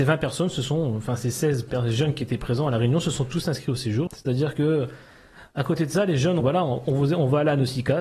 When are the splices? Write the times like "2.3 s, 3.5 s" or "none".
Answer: 4.1 s, 6.4 s